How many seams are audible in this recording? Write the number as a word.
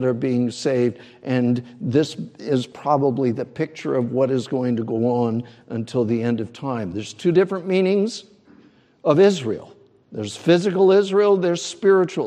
zero